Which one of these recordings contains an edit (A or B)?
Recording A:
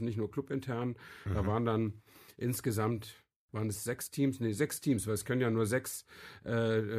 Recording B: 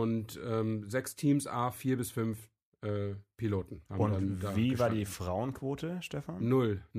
B